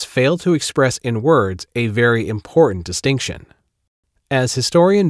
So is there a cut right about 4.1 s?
no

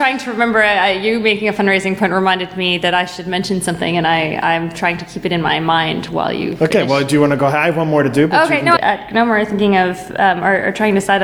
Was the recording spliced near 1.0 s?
no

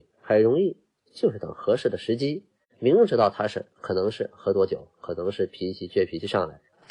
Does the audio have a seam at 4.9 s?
no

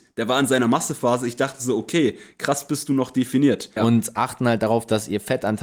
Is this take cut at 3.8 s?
yes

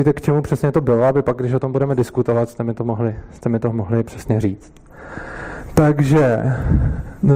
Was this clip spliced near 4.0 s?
yes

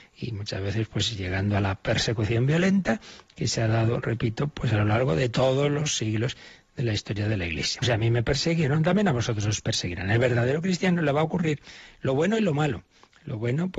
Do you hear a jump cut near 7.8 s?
yes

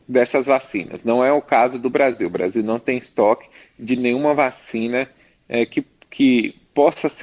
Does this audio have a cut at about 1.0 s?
no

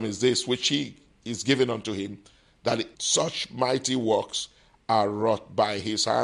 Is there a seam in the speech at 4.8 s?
no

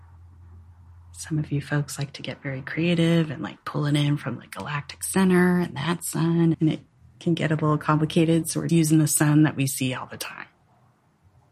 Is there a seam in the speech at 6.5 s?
yes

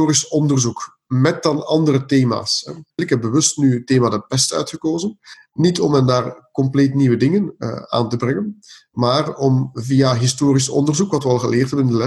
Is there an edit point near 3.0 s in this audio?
yes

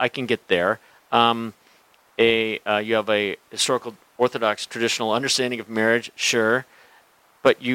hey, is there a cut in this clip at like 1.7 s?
no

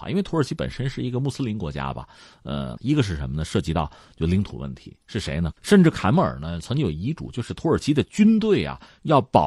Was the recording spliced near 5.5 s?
yes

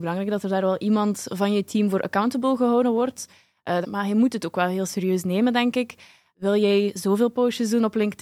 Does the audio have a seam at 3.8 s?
yes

